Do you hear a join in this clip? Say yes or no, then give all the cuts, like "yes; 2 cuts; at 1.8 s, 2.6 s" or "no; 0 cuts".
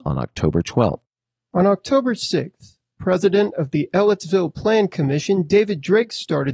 no; 0 cuts